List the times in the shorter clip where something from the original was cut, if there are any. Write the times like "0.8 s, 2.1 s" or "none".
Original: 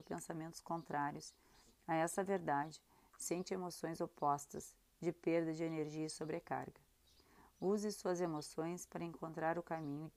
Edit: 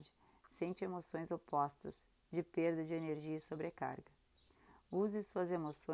none